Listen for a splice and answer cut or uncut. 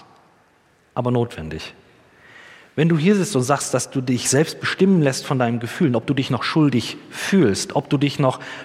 uncut